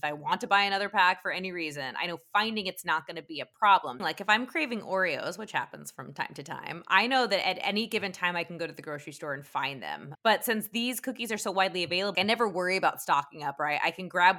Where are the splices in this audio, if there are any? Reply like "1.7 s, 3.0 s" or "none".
4.0 s, 10.1 s, 12.1 s